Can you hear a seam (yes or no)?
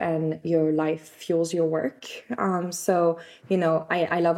no